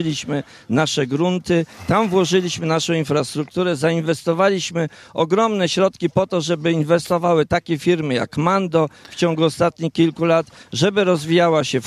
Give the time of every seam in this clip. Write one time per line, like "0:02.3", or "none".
none